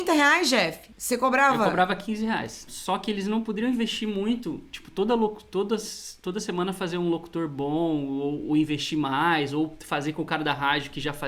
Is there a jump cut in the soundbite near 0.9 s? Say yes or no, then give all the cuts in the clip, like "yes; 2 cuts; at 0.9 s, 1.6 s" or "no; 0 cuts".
no; 1 cut; at 2.7 s